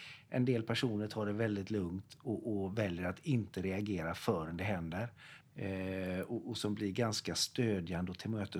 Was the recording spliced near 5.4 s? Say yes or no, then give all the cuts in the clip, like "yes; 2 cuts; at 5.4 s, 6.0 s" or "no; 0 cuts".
yes; 1 cut; at 5.4 s